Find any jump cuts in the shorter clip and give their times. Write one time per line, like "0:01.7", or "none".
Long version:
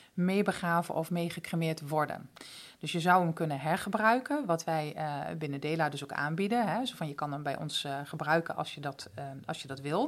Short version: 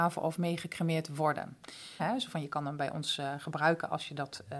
0:02.0